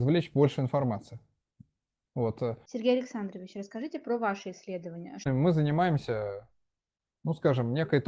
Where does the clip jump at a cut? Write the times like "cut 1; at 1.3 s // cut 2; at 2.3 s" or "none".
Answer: cut 1; at 2.7 s